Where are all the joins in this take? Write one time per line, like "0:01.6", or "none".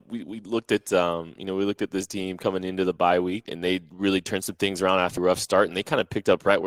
0:03.5
0:05.2